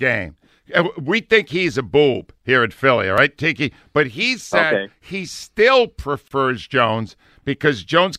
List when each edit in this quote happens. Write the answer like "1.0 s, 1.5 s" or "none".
none